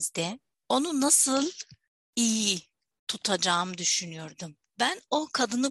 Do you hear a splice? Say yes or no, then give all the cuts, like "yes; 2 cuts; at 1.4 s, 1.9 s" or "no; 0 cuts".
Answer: no; 0 cuts